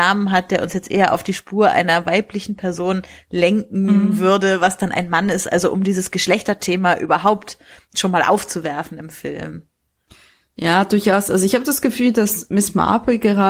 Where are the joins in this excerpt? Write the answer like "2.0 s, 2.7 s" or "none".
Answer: none

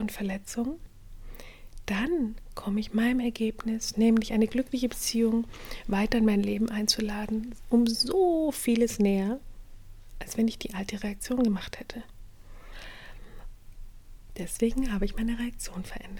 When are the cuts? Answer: 14.3 s

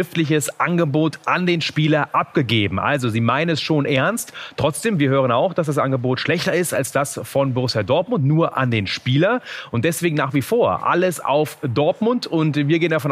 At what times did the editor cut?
none

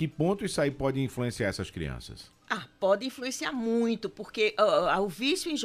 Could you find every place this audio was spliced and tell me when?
none

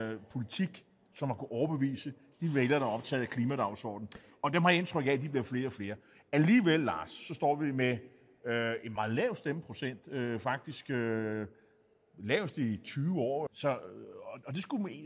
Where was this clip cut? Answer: 9.0 s, 13.5 s

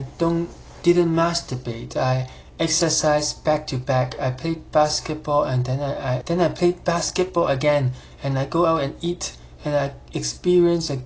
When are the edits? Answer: 6.2 s

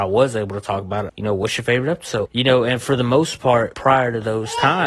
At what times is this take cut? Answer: 1.1 s, 2.3 s, 3.7 s

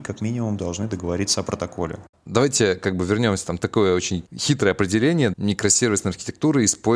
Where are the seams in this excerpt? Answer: none

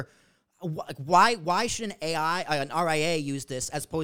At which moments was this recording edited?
none

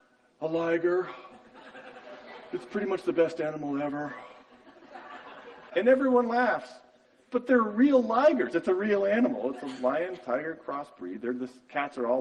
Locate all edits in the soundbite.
5.7 s

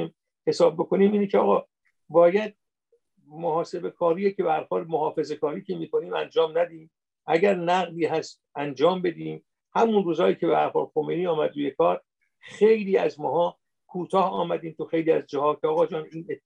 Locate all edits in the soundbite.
none

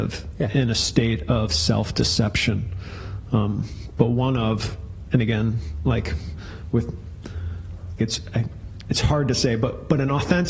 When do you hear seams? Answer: 8.0 s

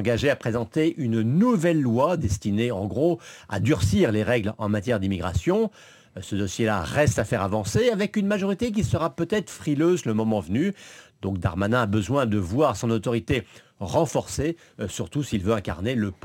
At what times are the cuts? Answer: none

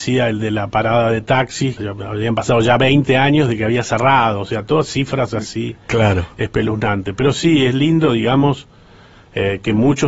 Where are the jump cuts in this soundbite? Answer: 1.8 s

